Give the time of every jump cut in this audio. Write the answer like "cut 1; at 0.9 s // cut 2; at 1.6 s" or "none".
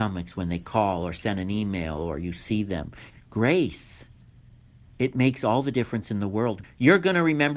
cut 1; at 3.1 s // cut 2; at 6.6 s